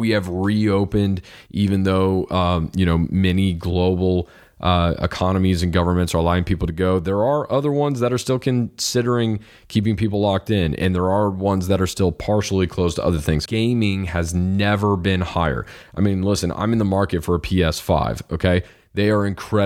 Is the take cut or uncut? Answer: cut